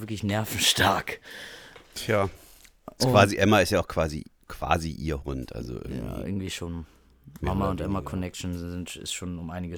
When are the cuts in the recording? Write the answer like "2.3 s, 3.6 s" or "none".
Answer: none

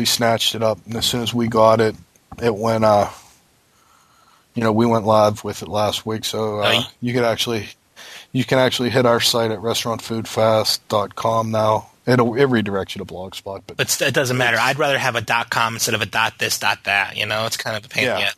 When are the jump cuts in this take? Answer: none

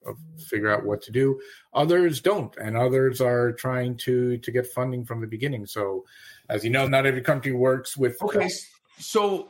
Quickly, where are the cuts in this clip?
6.9 s, 8.2 s

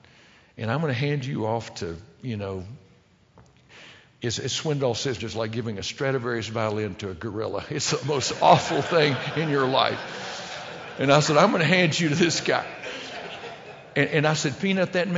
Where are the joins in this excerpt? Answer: 5.2 s

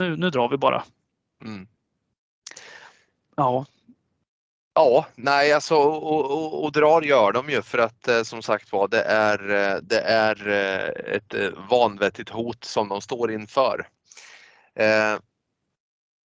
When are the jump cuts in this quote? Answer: none

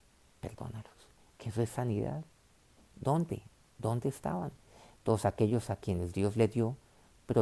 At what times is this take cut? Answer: 1.2 s, 2.9 s

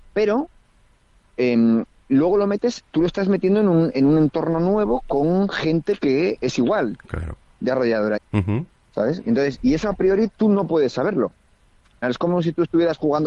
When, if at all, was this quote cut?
8.2 s, 12.0 s

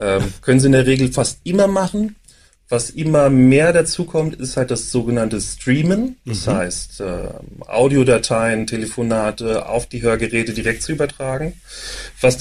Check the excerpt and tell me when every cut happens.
none

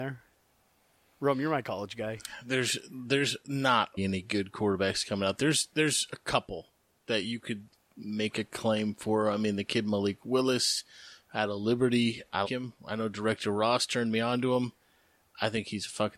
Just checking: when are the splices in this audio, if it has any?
4.0 s, 12.4 s

